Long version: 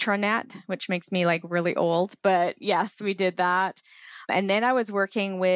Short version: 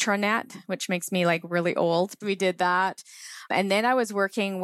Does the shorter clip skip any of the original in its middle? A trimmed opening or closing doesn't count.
yes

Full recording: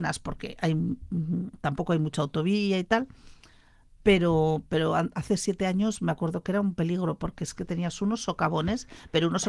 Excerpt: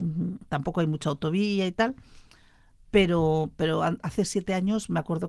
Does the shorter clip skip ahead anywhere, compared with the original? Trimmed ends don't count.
no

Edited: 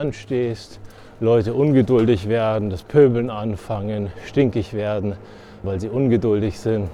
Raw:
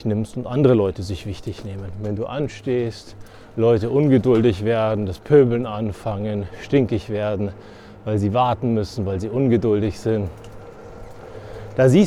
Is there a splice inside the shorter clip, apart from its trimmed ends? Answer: yes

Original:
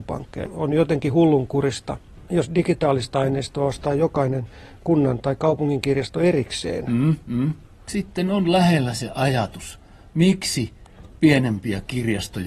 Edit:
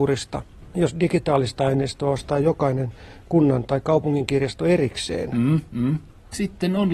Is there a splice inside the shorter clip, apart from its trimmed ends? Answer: no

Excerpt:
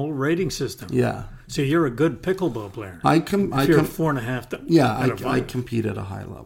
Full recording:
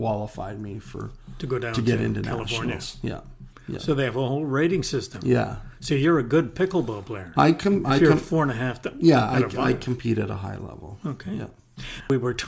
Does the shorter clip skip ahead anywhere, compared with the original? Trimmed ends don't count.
no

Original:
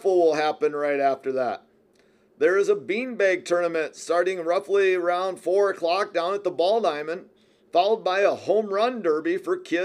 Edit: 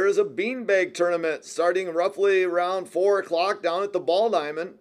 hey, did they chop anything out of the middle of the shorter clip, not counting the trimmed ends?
no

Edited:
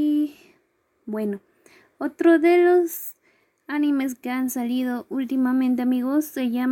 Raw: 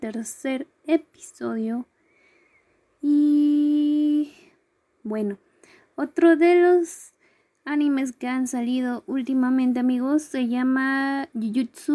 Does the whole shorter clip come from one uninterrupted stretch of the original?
yes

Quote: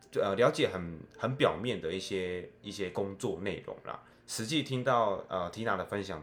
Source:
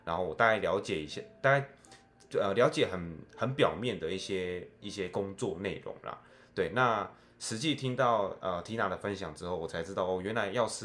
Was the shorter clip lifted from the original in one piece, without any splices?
no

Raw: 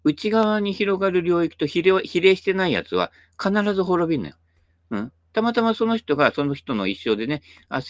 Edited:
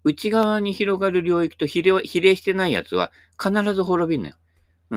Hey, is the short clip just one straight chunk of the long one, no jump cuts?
yes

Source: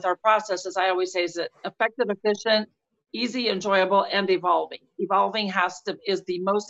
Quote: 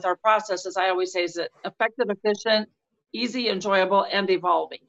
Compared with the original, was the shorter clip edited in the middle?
no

